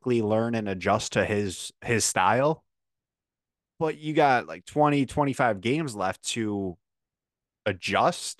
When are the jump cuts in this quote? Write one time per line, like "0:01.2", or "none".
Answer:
none